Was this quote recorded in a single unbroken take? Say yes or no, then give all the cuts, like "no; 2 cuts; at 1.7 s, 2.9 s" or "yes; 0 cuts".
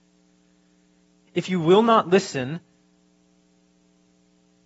no; 1 cut; at 1.3 s